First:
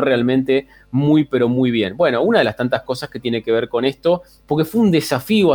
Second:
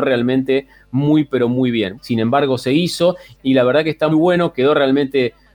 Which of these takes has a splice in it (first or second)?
second